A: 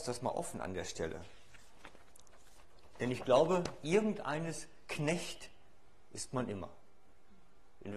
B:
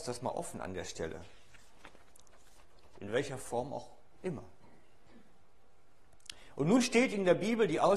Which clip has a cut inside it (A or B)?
B